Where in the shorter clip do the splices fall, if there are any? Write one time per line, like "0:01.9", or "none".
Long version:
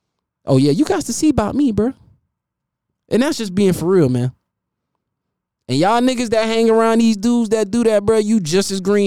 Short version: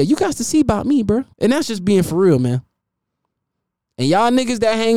0:01.3